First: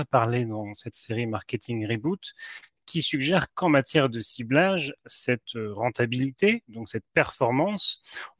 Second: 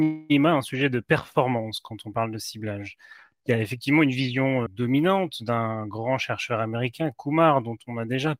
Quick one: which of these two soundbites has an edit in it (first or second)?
second